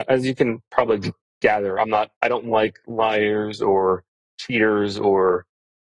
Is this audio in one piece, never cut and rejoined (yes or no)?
yes